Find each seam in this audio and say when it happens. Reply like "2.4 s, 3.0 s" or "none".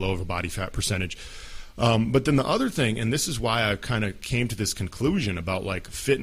none